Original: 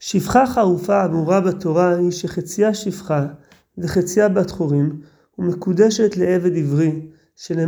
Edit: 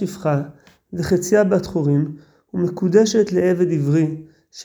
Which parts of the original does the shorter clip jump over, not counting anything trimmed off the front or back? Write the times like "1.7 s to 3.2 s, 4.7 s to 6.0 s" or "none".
none